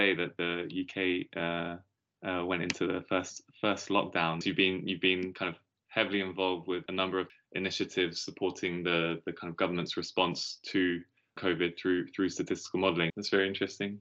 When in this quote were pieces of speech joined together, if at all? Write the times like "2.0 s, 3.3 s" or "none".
4.4 s, 13.1 s